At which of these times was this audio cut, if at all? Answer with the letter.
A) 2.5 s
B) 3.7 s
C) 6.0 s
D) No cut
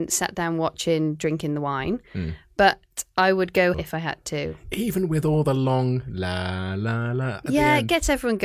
B